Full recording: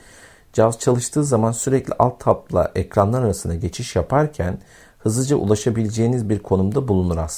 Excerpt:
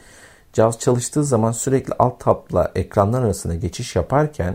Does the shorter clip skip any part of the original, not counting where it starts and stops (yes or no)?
no